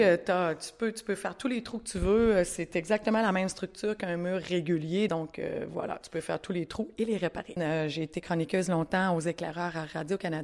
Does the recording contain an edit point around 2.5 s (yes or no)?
no